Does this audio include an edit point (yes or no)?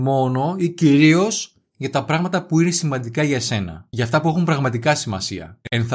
no